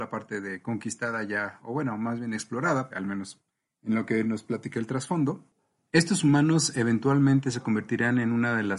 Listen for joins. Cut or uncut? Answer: cut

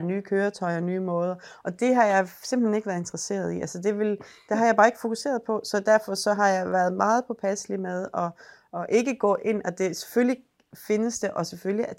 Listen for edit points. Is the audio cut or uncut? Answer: uncut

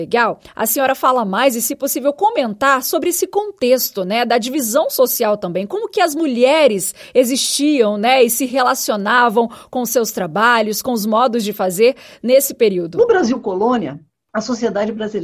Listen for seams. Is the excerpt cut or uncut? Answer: uncut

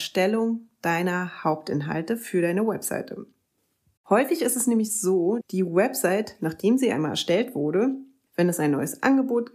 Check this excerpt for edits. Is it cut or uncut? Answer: cut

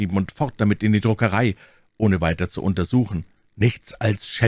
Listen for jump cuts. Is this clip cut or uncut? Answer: cut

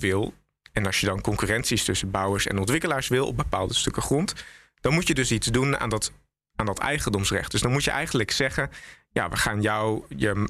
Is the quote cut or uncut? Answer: uncut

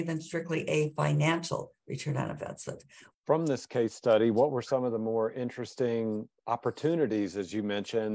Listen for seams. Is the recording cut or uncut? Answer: cut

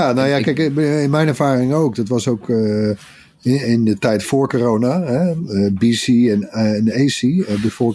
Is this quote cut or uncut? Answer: uncut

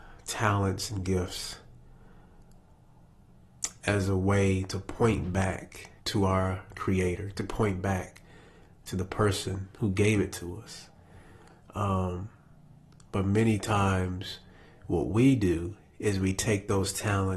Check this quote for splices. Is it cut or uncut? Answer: cut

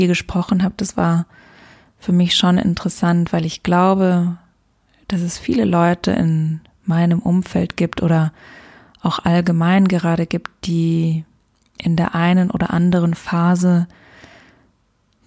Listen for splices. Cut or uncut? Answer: uncut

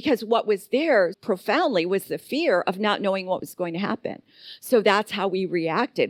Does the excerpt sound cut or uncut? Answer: cut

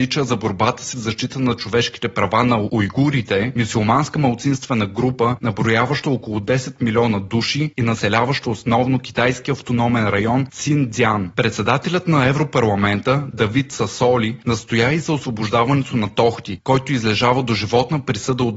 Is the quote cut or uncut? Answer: uncut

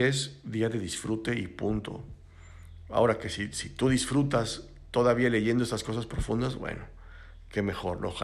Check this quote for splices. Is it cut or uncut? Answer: uncut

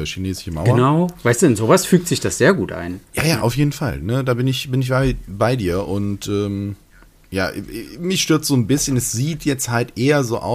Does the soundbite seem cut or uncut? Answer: cut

